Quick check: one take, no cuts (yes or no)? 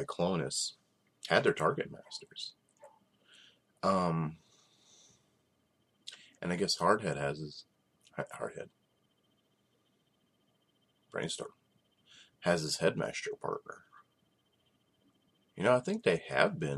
yes